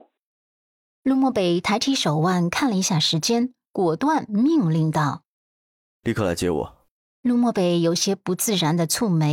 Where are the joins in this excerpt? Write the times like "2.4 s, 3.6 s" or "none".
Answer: 3.6 s, 7.0 s